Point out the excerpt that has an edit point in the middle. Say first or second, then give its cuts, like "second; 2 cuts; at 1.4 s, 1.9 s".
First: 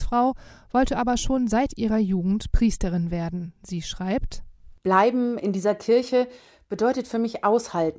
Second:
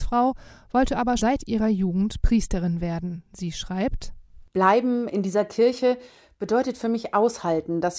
second; 1 cut; at 1.2 s